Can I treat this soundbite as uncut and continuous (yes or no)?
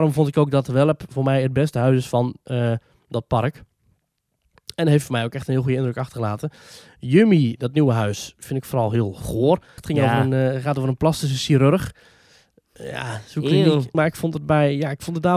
no